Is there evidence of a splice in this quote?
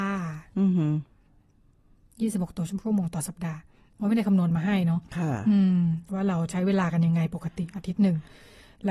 no; 0 cuts

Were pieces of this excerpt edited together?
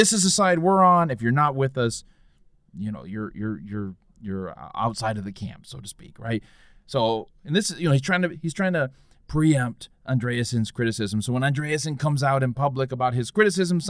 no; 0 cuts

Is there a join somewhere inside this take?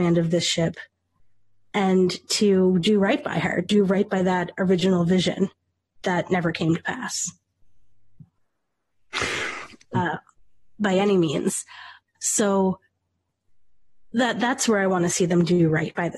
yes; 2 cuts; at 9.9 s, 12.1 s

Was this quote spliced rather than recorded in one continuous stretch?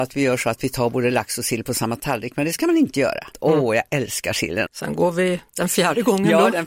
yes; 2 cuts; at 3.3 s, 4.7 s

